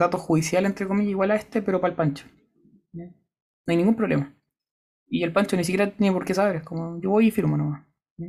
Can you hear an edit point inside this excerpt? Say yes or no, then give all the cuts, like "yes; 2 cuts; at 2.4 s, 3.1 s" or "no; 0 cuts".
no; 0 cuts